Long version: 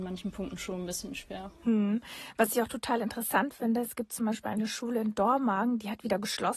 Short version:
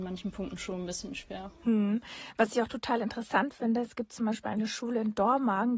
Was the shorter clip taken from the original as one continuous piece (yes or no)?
yes